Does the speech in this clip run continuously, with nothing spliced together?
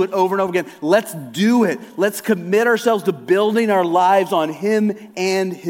yes; 0 cuts

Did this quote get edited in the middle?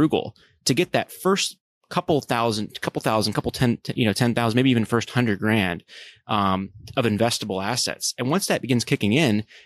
no; 0 cuts

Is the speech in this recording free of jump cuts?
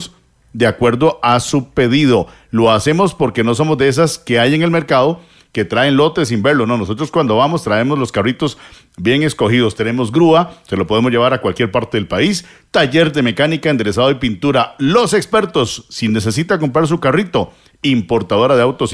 yes; 0 cuts

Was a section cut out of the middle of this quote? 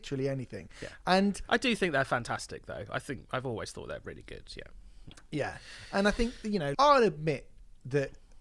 yes; 1 cut; at 6.7 s

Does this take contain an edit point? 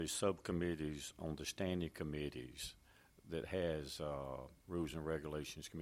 yes; 1 cut; at 4.6 s

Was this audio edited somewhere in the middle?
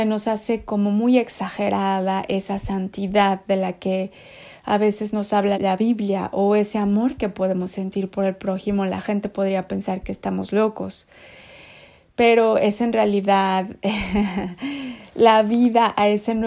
yes; 1 cut; at 5.5 s

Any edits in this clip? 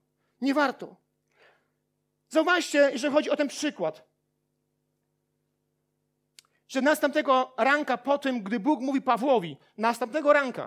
no; 0 cuts

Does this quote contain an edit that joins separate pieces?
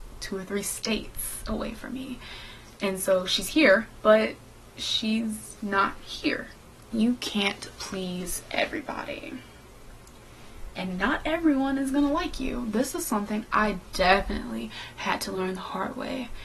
yes; 2 cuts; at 4.0 s, 6.9 s

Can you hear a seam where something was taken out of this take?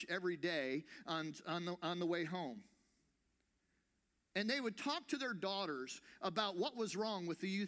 no; 0 cuts

